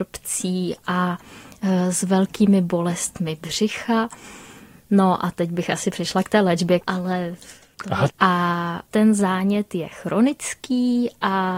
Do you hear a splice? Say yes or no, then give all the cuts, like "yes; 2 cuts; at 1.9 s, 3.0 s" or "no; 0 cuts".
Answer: yes; 2 cuts; at 6.8 s, 8.1 s